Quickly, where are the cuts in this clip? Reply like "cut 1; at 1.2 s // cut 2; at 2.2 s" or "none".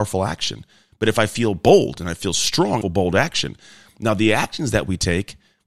cut 1; at 2.8 s